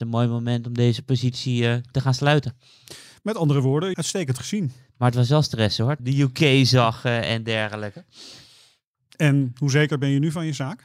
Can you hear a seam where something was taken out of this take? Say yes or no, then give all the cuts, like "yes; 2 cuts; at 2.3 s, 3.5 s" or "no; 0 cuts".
yes; 2 cuts; at 3.9 s, 6.0 s